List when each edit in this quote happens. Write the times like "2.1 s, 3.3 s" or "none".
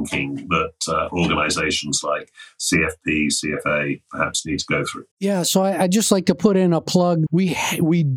5.1 s, 7.3 s